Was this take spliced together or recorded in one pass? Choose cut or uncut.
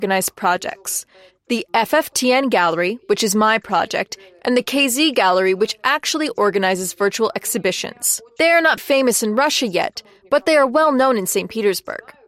cut